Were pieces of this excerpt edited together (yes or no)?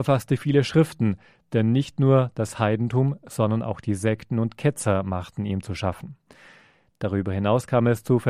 no